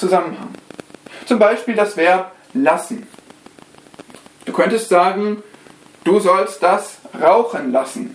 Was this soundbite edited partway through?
no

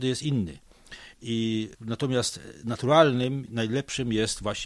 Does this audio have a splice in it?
no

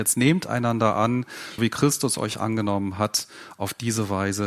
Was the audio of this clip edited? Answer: yes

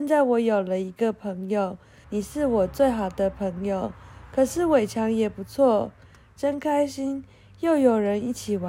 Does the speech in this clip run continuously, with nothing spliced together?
no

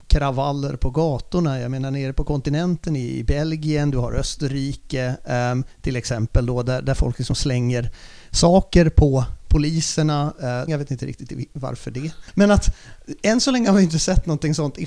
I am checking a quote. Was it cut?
yes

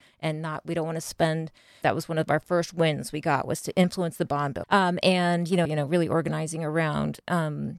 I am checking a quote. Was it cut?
yes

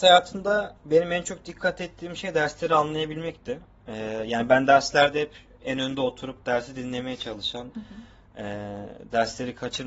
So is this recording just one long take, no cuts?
no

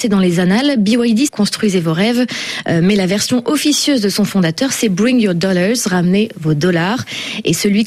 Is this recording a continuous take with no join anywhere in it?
no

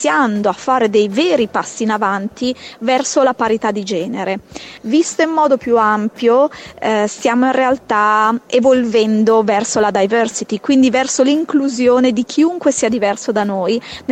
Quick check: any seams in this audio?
yes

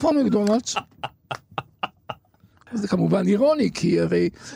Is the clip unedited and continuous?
no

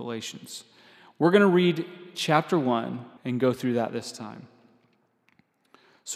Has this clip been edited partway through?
yes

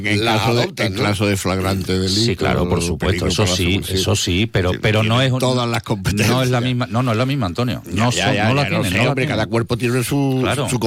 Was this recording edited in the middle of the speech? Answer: no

